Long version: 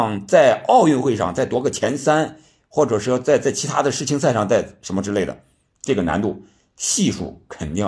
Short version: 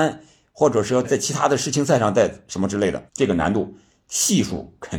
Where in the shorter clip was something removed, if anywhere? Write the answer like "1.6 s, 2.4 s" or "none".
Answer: 1.0 s, 3.1 s